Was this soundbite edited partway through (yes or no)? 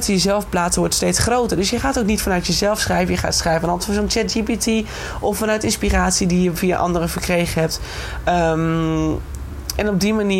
no